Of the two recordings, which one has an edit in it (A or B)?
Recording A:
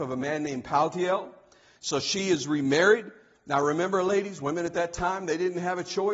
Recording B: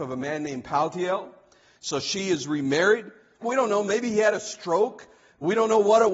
B